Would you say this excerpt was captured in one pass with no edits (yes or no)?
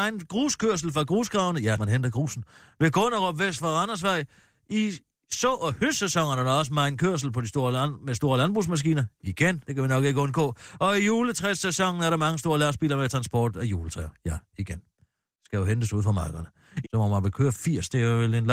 no